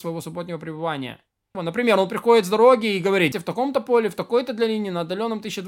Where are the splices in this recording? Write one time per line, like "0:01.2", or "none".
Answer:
0:01.5
0:03.3